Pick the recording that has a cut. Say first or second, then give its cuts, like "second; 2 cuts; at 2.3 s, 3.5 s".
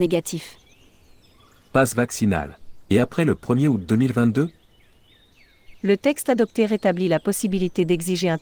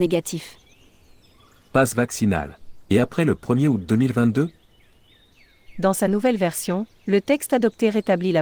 first; 1 cut; at 5.7 s